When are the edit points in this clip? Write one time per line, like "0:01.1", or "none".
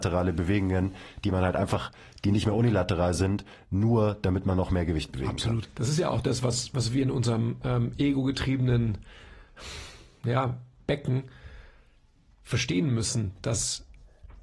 0:05.6

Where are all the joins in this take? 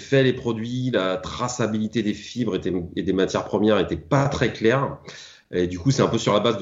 none

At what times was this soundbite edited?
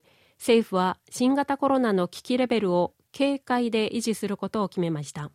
none

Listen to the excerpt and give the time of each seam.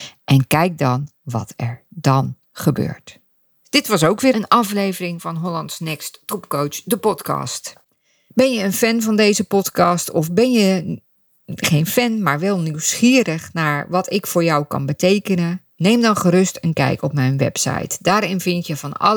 none

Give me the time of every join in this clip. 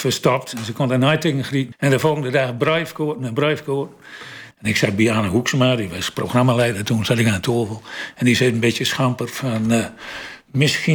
0:01.7
0:04.5

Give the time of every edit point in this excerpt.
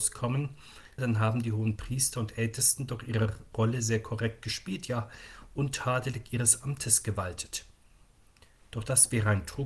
0:01.0

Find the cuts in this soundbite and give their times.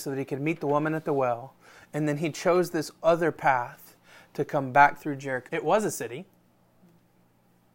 0:05.5

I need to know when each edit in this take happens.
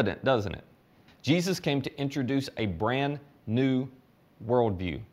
0:01.1

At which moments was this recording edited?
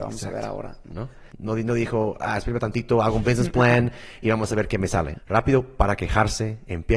0:01.3
0:05.1

